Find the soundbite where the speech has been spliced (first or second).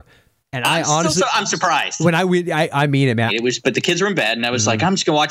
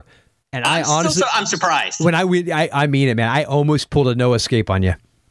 first